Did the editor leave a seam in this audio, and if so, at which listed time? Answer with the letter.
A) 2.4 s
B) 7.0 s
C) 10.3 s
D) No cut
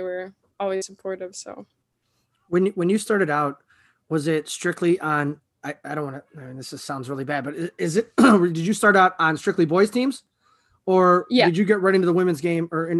D